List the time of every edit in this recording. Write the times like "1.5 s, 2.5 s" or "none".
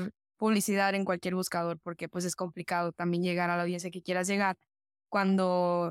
1.1 s